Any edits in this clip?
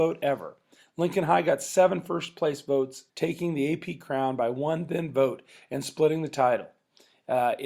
yes; 1 cut; at 3.1 s

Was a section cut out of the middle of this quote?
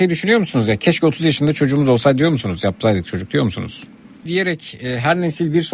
yes; 1 cut; at 4.3 s

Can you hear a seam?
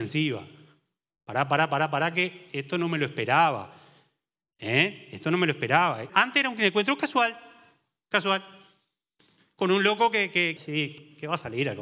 yes; 2 cuts; at 6.1 s, 10.6 s

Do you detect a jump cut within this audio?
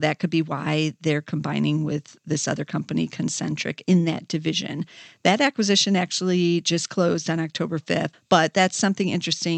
yes; 1 cut; at 8.1 s

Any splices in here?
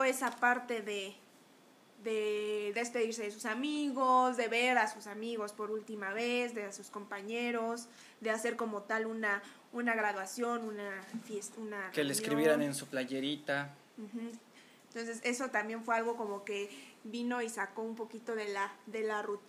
no; 0 cuts

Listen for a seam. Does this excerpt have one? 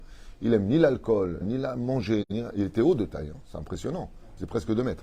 yes; 1 cut; at 1.4 s

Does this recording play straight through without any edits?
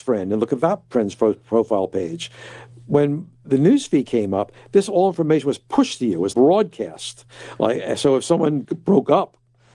no; 1 cut; at 6.3 s

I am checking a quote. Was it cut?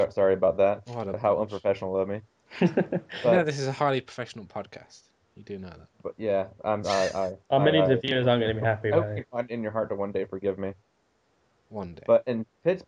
yes; 2 cuts; at 2.3 s, 5.9 s

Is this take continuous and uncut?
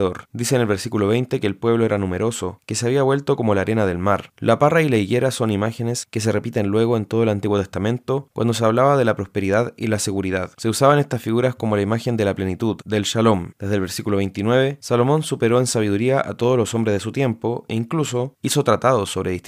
no; 1 cut; at 4.3 s

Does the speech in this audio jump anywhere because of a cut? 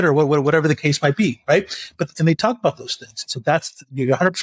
yes; 1 cut; at 3.3 s

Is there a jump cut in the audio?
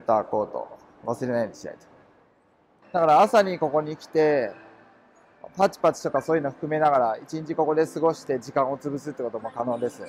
yes; 1 cut; at 2.8 s

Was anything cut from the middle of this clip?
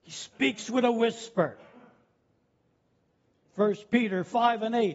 yes; 1 cut; at 3.5 s

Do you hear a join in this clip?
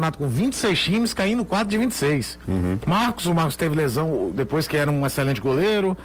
yes; 2 cuts; at 2.8 s, 4.4 s

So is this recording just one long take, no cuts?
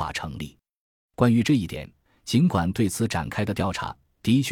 no; 1 cut; at 2.1 s

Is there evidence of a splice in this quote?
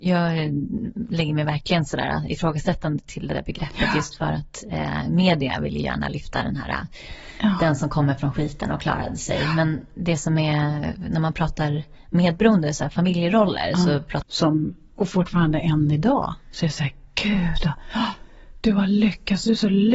yes; 1 cut; at 14.2 s

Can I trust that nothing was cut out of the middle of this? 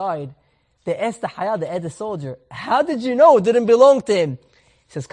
yes; 0 cuts

